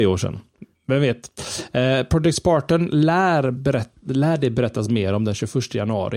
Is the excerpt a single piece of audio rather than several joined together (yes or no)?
yes